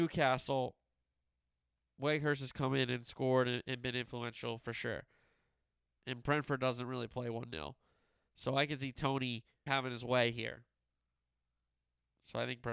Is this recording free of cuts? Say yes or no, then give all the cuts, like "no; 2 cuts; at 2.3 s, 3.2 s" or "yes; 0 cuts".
no; 2 cuts; at 6.0 s, 9.7 s